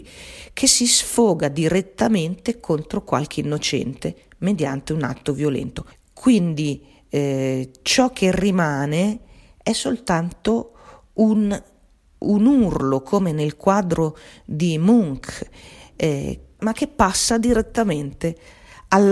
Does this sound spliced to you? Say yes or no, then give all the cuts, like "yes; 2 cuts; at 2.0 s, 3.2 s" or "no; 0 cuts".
yes; 2 cuts; at 5.9 s, 16.6 s